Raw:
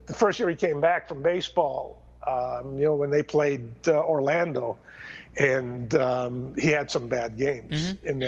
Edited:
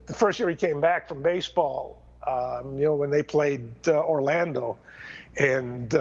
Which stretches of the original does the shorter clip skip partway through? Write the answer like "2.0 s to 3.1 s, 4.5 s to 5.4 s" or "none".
none